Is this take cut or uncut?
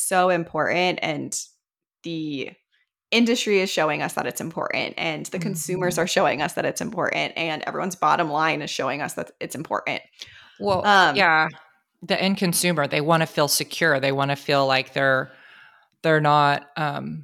uncut